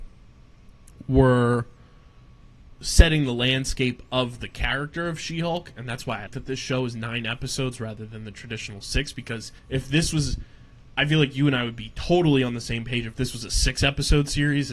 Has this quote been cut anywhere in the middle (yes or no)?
yes